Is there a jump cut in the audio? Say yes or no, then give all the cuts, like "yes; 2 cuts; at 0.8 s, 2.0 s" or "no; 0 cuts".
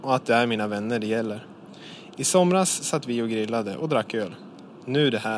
no; 0 cuts